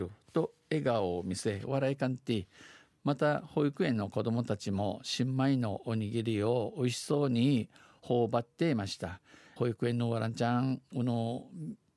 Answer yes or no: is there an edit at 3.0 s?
no